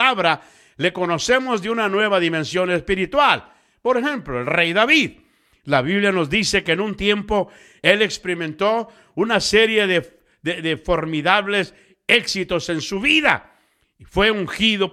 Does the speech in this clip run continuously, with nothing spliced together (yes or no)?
yes